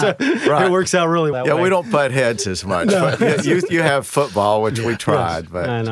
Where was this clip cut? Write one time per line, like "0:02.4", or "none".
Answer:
0:01.3